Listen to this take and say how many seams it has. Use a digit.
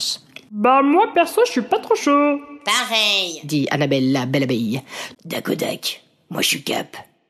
1